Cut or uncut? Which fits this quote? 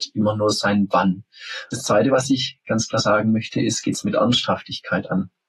uncut